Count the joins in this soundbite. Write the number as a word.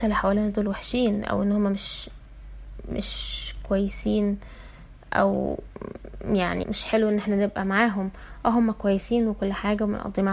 one